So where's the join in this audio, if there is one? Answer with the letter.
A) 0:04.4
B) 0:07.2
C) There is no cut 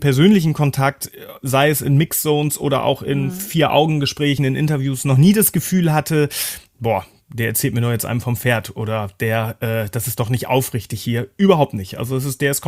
C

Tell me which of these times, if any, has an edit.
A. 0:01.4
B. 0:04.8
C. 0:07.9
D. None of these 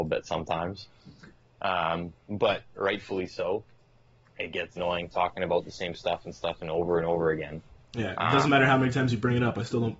B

